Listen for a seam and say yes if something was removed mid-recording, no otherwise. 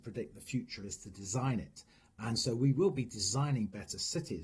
no